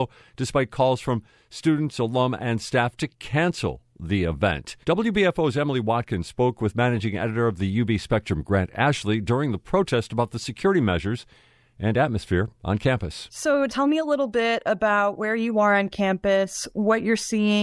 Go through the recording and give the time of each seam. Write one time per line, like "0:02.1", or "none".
0:04.8
0:13.7

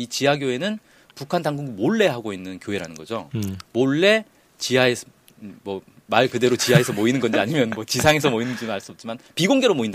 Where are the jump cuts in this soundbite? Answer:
none

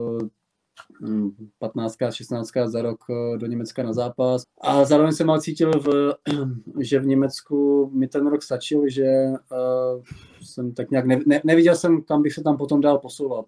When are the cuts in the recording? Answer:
0:04.4

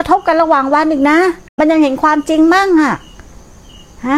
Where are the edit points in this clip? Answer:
0:01.5

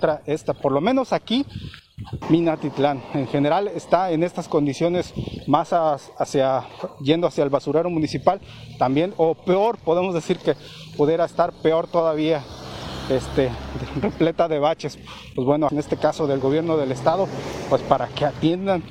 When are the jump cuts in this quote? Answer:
0:02.2
0:15.7

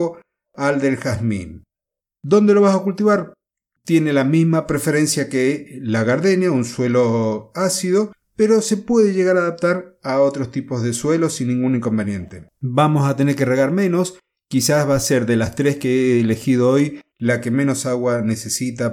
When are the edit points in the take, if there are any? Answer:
none

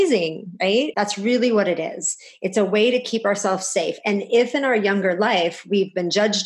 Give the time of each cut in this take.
0:00.9

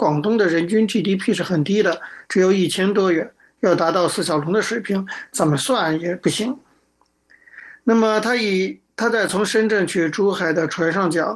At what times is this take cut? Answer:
none

